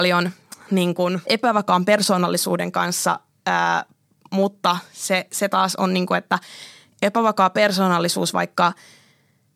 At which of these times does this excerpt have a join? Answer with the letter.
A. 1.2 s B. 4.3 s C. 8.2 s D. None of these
A